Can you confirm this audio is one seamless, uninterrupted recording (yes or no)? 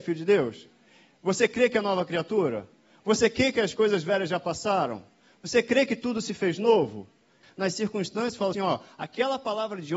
no